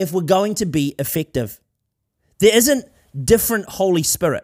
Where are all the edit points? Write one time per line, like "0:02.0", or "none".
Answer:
none